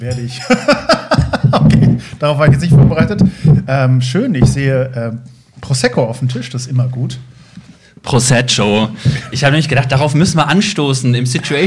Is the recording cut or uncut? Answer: uncut